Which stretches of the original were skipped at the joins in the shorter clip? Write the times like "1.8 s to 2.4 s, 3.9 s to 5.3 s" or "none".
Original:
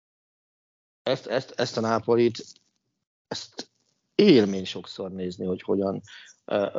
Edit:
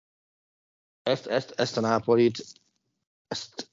none